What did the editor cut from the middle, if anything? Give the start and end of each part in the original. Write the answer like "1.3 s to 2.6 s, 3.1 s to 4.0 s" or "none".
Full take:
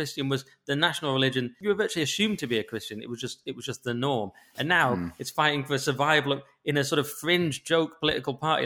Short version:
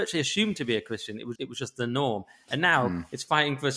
3.2 s to 3.4 s